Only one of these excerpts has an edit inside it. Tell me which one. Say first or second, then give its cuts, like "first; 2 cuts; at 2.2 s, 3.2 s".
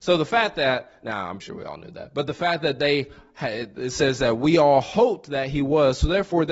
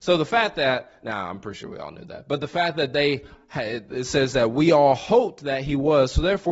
first; 1 cut; at 1.4 s